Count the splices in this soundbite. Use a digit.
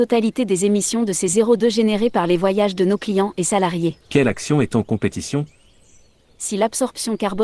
1